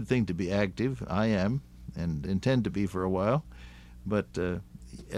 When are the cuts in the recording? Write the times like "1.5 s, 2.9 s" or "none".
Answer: none